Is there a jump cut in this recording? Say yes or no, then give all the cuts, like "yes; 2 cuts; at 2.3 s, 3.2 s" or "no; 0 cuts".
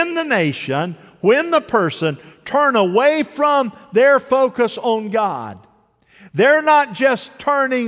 no; 0 cuts